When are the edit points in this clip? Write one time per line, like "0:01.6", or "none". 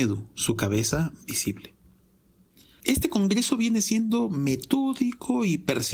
none

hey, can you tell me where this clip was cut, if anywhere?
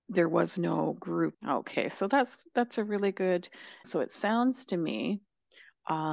0:01.3
0:03.8

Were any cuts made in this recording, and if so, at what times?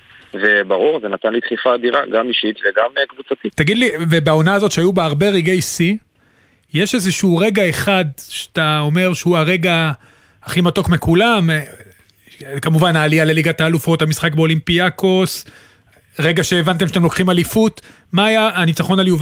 0:03.5

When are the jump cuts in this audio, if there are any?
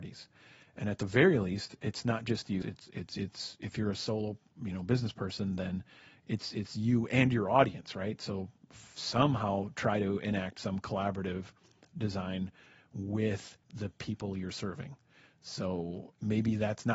0:02.6
0:13.6

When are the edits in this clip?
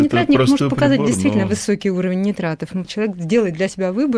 0:02.8

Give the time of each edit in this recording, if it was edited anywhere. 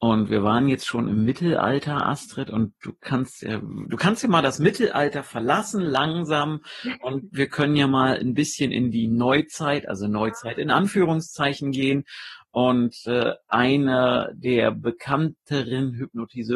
none

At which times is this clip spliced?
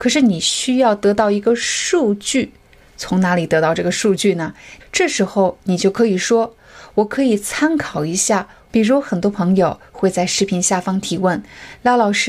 0:04.8
0:08.7

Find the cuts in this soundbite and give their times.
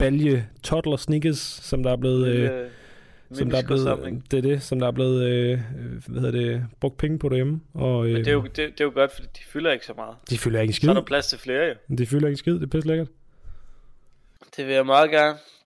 0:14.4

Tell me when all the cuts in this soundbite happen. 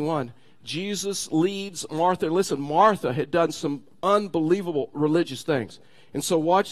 none

